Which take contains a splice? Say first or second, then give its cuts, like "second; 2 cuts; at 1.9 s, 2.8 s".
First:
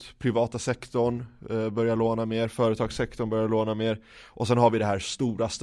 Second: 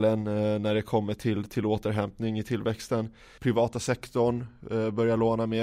second; 1 cut; at 3.4 s